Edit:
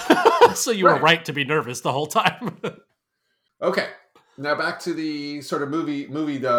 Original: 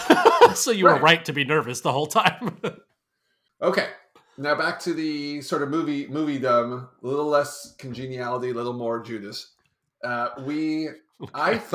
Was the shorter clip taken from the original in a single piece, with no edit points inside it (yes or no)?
yes